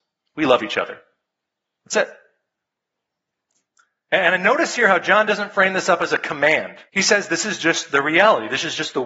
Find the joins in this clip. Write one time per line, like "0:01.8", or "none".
0:06.9